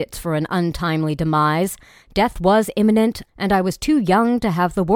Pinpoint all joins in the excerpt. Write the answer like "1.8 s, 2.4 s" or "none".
3.3 s

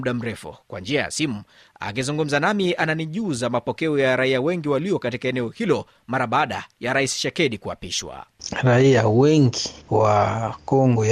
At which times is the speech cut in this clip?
9.8 s

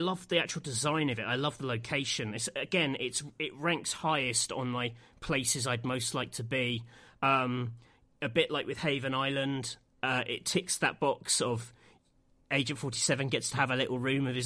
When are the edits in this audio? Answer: none

